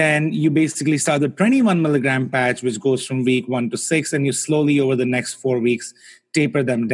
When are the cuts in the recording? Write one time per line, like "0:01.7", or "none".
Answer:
none